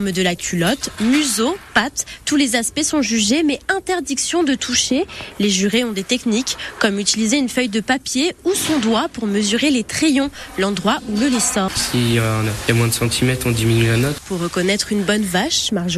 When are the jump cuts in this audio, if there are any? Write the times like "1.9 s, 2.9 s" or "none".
11.7 s, 14.2 s